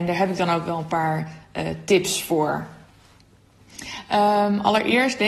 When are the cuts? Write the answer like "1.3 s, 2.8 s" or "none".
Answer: none